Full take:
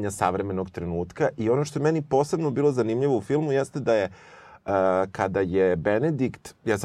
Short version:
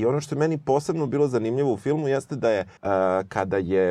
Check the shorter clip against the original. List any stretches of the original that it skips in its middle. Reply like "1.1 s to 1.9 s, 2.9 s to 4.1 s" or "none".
4.2 s to 4.6 s